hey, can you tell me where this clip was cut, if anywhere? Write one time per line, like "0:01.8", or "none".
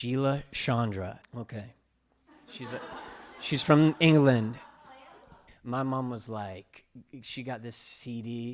0:01.2
0:05.5